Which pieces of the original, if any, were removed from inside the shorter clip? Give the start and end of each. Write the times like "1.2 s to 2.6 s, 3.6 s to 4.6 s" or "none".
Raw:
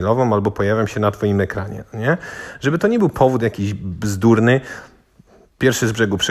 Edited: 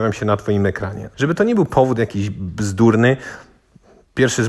1.9 s to 2.6 s